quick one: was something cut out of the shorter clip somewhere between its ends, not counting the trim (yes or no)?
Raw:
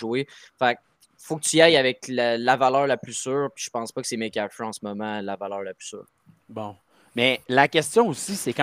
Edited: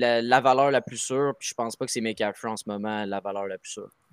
no